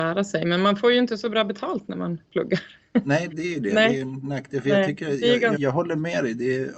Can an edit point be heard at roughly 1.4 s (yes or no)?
no